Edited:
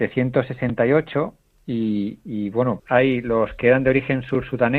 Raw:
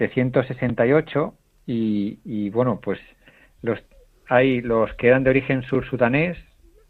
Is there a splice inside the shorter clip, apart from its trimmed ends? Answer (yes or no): yes